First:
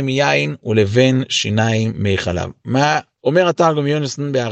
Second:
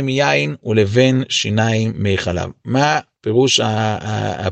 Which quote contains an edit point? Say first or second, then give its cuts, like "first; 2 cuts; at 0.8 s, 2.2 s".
first; 1 cut; at 3.2 s